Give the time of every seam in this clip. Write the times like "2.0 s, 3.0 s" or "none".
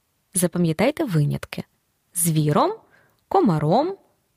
none